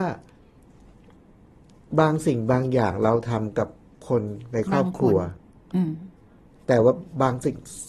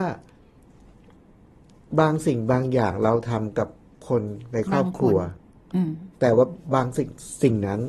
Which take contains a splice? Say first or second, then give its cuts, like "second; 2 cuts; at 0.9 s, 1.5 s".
second; 1 cut; at 6.1 s